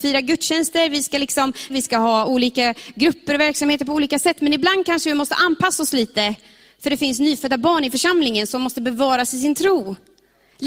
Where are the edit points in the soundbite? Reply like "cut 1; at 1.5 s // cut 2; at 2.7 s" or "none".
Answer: cut 1; at 1.7 s